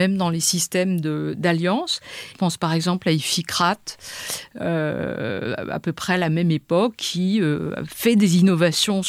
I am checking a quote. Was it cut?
yes; 1 cut; at 2.3 s

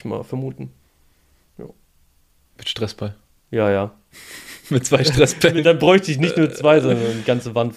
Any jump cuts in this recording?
no; 0 cuts

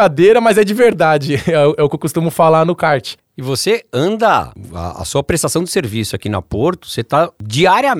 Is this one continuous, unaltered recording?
yes; 0 cuts

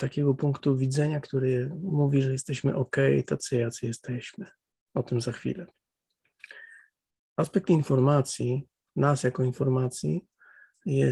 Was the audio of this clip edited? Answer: yes; 1 cut; at 4.8 s

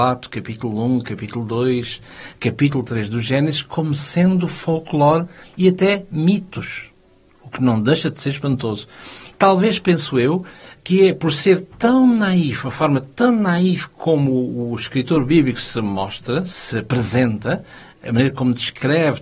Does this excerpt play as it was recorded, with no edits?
no; 1 cut; at 9.3 s

